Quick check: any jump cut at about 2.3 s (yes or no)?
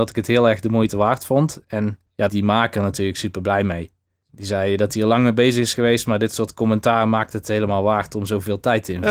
yes